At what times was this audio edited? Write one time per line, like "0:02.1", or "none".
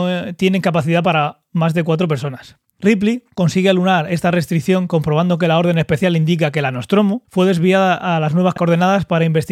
0:02.8
0:07.2